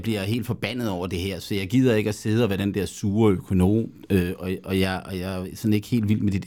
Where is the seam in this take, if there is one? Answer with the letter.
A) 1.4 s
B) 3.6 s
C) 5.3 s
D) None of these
D